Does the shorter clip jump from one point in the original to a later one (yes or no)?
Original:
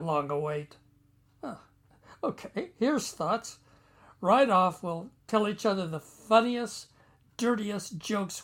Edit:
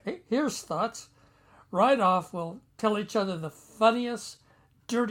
no